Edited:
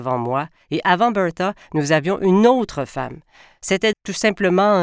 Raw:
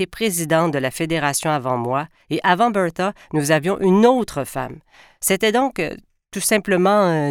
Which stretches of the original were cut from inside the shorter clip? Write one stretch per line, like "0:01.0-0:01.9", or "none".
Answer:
0:05.5-0:06.2